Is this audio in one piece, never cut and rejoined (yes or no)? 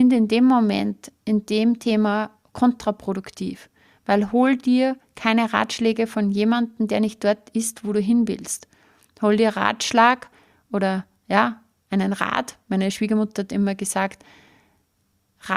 yes